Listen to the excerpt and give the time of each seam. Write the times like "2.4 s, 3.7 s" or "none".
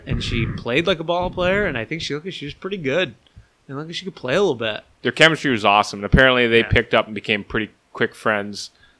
5.0 s